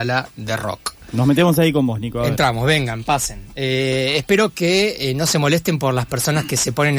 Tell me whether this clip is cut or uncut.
uncut